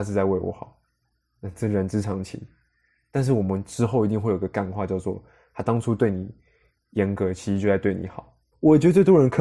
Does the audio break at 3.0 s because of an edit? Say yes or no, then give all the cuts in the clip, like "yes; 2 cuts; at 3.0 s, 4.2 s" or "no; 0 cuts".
no; 1 cut; at 8.5 s